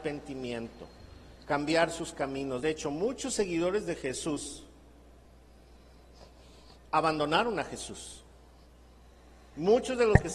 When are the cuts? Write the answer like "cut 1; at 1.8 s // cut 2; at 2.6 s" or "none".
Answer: none